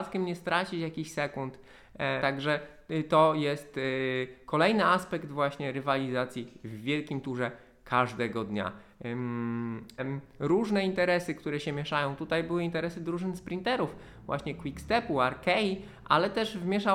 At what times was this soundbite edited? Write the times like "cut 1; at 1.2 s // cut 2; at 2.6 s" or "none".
cut 1; at 2.2 s // cut 2; at 10.0 s

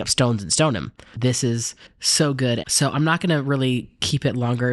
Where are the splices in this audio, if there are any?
cut 1; at 1.1 s // cut 2; at 2.6 s

